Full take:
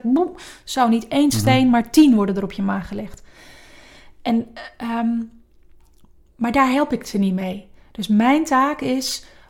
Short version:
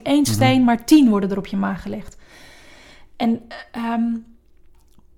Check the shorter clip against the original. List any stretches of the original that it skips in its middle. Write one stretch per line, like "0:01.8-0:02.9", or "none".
none